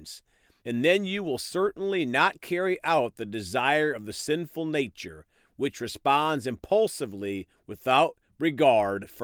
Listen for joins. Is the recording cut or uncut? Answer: uncut